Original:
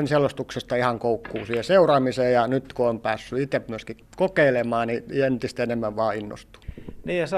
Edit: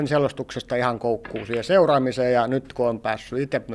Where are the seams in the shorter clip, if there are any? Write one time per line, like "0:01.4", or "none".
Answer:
none